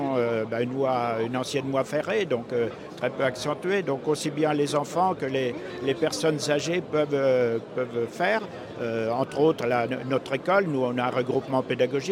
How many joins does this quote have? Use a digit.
0